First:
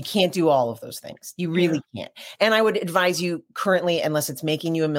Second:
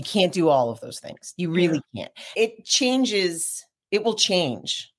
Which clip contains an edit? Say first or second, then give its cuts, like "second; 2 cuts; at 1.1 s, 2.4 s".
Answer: second; 1 cut; at 2.4 s